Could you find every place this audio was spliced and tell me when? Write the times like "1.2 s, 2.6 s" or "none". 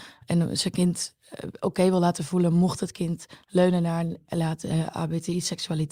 none

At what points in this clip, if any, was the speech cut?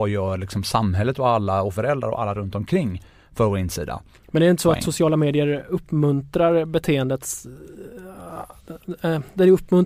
none

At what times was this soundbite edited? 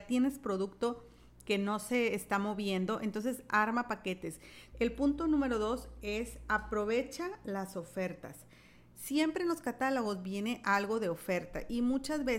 4.7 s

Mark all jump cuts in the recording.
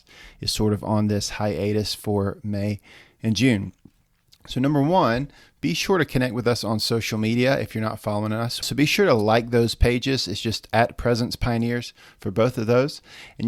8.6 s

